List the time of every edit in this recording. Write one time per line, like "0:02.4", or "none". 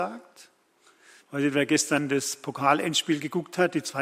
0:01.3

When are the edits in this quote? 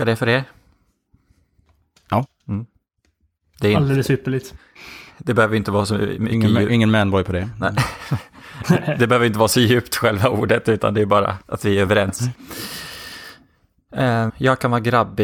0:11.4
0:14.3

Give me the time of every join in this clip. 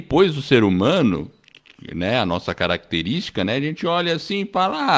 none

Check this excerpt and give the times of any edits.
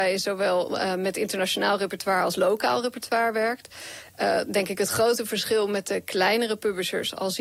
none

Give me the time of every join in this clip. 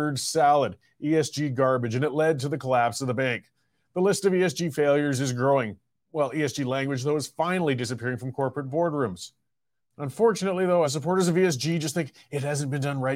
0:09.8
0:10.8

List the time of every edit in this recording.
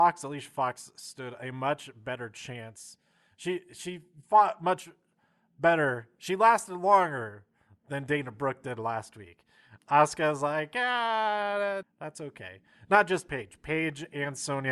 0:09.8
0:11.8

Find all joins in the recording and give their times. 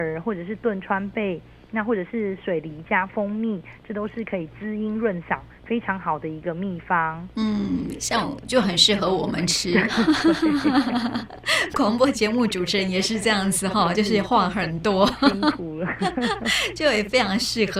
none

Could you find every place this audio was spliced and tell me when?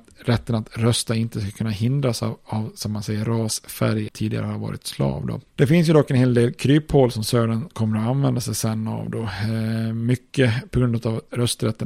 0:04.1

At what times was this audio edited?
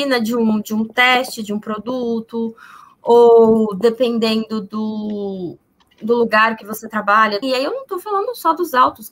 0:07.4

